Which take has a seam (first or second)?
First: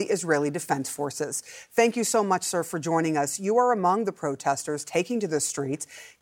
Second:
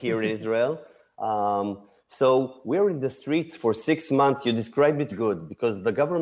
second